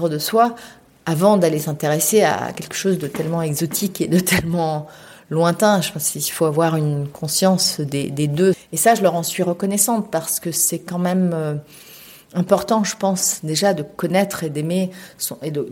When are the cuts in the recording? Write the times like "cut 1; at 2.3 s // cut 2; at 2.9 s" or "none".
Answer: cut 1; at 8.5 s